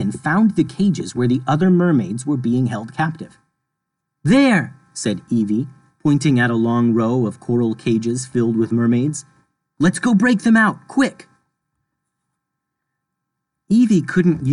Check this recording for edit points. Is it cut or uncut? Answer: uncut